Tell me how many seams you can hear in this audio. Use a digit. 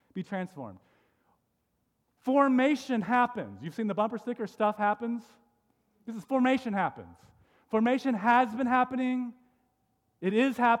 0